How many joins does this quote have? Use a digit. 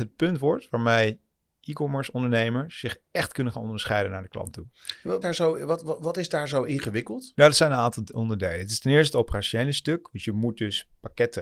2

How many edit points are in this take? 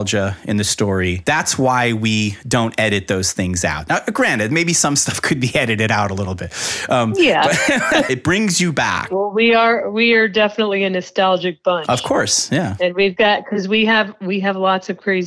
1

